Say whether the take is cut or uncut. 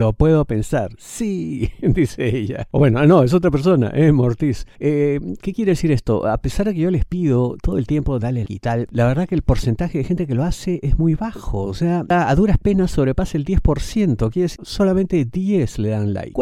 cut